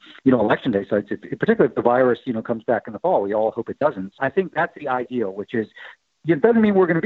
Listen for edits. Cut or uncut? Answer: cut